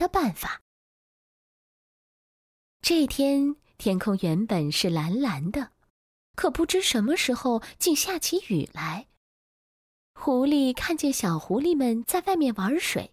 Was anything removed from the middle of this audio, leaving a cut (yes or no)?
no